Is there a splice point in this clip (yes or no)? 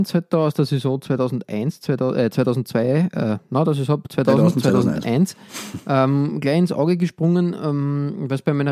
no